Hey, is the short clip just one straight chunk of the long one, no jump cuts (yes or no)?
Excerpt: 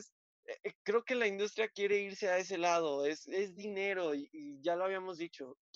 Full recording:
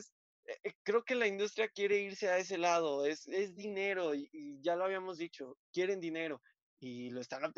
yes